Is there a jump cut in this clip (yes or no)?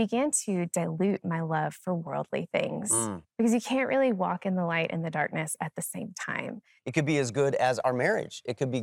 yes